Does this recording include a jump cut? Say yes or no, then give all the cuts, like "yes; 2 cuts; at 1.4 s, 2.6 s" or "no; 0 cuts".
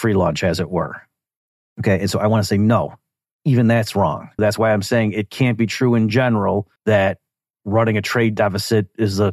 yes; 2 cuts; at 4.4 s, 6.8 s